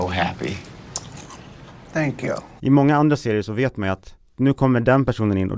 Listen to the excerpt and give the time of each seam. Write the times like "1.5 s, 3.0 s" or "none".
2.6 s

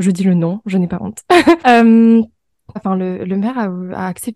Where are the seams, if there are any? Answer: 1.6 s, 2.8 s

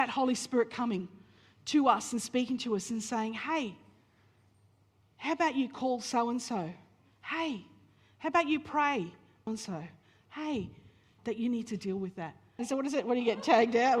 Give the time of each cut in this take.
9.5 s, 11.2 s, 12.6 s

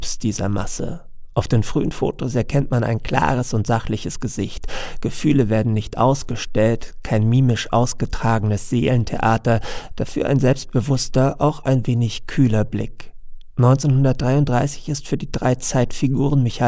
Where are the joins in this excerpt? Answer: none

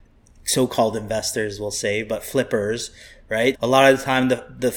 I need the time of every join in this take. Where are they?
3.5 s

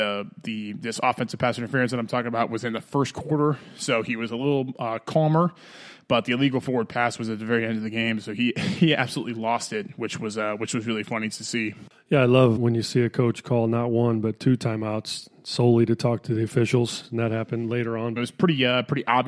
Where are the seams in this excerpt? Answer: 12.6 s, 18.2 s

